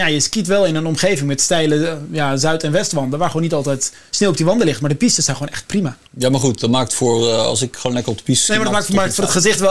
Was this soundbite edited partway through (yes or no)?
yes